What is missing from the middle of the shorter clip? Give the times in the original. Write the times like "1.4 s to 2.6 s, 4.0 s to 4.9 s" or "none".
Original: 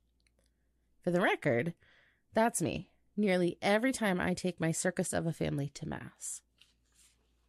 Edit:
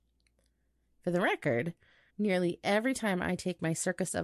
2.1 s to 3.1 s